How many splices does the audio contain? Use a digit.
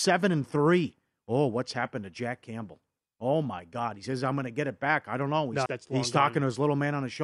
1